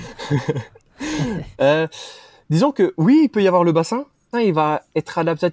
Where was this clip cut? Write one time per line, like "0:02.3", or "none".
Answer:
0:04.3

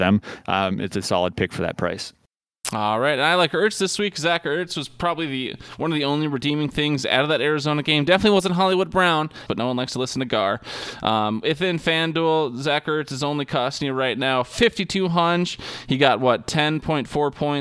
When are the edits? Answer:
0:09.5

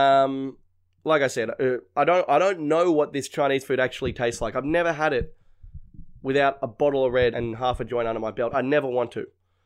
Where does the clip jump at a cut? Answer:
0:07.3
0:08.5

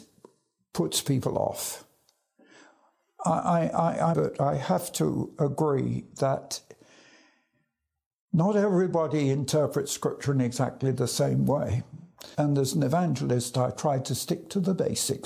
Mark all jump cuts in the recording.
0:04.1
0:12.3

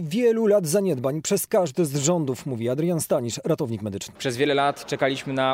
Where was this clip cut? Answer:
0:04.1

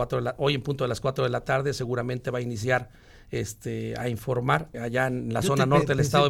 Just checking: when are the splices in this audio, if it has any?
0:04.7

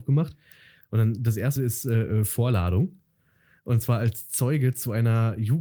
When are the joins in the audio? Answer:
0:01.6

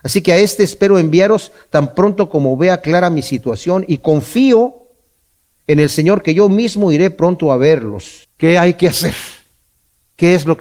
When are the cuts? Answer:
0:08.2

